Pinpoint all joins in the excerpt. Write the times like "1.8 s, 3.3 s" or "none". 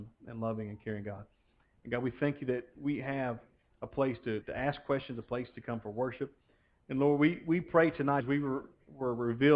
4.4 s, 8.2 s